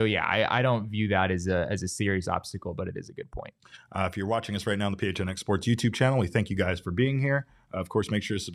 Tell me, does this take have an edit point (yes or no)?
no